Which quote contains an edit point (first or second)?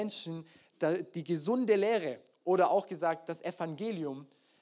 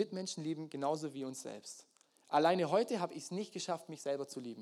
second